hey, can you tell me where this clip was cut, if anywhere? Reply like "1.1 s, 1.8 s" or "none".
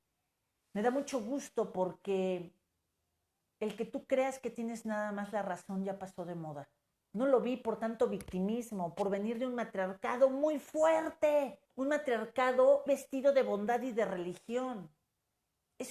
7.0 s, 11.7 s, 12.9 s